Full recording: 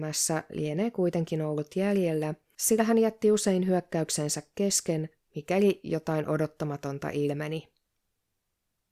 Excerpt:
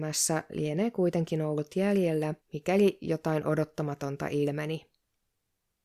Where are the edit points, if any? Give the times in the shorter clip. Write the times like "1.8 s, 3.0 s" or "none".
2.4 s